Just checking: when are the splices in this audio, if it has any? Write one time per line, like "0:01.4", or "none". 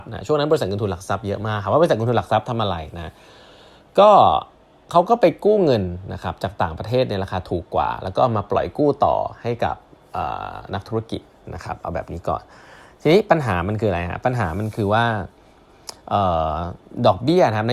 none

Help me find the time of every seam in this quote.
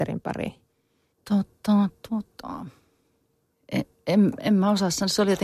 0:01.1
0:03.5

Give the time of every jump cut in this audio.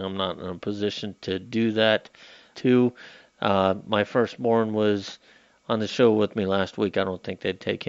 0:02.5

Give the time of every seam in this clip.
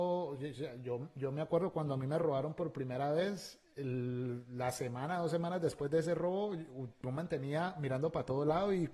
none

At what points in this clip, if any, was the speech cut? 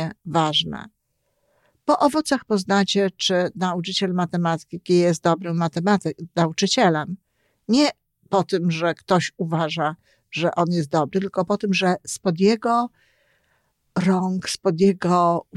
none

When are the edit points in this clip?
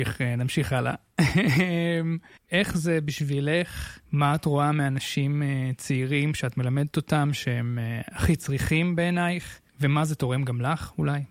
0:02.4
0:04.0
0:09.7

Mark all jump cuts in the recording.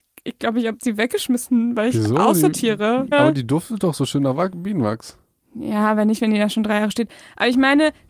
0:03.1

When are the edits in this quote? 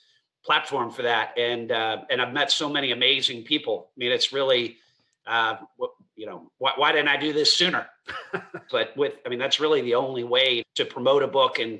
0:08.7
0:10.6

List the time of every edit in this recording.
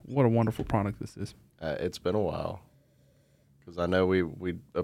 0:01.5

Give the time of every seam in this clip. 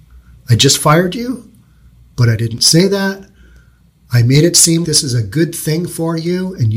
0:04.8

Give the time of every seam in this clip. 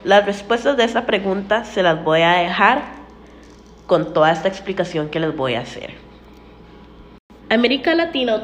0:07.4

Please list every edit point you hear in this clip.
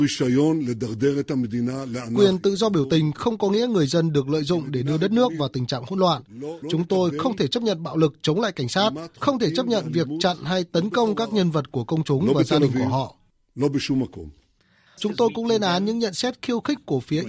0:06.6
0:15.0

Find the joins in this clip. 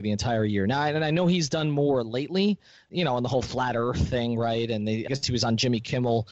0:05.1

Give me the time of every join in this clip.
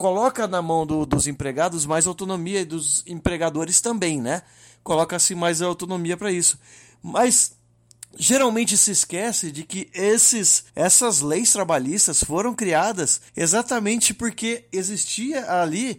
0:10.7
0:13.3

